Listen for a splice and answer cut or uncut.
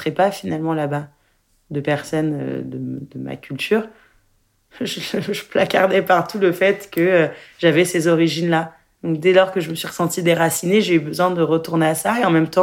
cut